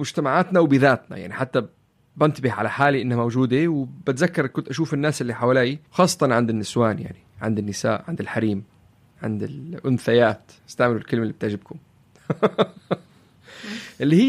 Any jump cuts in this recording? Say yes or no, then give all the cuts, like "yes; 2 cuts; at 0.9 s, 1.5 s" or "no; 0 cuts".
yes; 2 cuts; at 5.9 s, 10.6 s